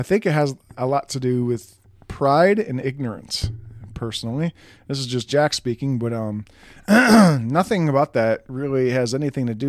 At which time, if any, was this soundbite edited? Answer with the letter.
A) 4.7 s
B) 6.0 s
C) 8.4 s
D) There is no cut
D